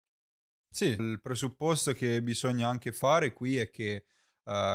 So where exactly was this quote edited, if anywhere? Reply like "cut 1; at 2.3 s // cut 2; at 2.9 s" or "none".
cut 1; at 1.0 s